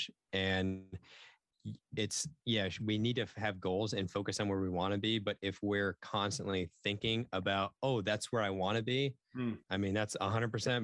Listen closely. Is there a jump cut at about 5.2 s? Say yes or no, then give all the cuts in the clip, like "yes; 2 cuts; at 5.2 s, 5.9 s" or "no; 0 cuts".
no; 1 cut; at 9.6 s